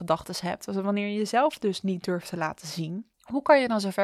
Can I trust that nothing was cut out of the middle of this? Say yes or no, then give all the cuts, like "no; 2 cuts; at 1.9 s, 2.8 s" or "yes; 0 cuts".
no; 1 cut; at 3.1 s